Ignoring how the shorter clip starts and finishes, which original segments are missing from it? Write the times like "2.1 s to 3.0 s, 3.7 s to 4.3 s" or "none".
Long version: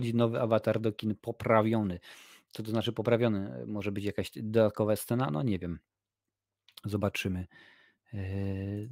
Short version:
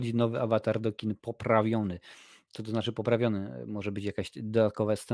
none